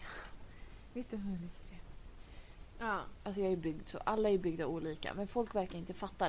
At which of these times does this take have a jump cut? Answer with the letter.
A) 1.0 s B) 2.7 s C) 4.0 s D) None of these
B